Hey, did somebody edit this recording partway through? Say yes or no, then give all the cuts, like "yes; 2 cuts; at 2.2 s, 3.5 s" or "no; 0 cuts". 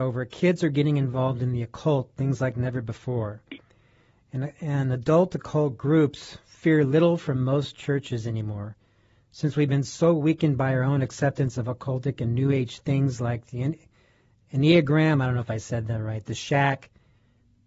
no; 0 cuts